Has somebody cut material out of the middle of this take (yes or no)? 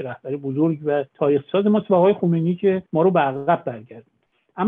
yes